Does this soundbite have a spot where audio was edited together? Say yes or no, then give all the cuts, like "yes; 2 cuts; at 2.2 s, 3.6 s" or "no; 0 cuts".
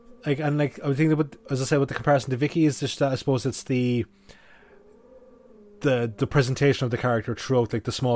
no; 0 cuts